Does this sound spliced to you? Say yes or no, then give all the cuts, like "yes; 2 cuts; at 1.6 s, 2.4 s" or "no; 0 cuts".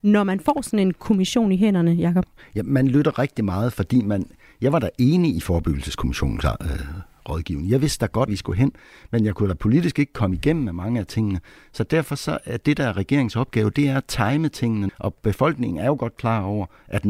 yes; 2 cuts; at 8.3 s, 14.9 s